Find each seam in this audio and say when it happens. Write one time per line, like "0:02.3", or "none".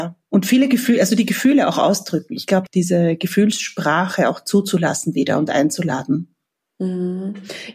0:02.7

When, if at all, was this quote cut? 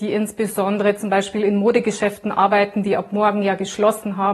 none

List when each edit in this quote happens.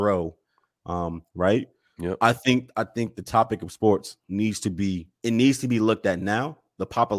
0:01.3
0:05.1

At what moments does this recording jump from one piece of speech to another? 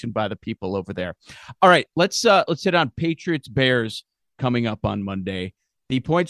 none

